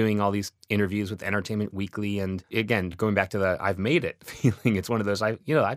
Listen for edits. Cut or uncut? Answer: uncut